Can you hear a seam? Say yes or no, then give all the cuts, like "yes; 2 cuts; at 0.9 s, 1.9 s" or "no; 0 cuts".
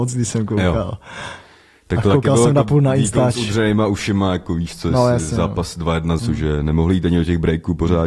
yes; 1 cut; at 6.2 s